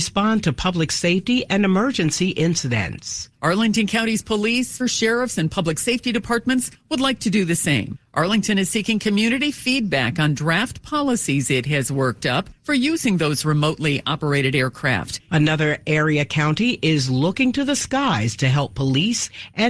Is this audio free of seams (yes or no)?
no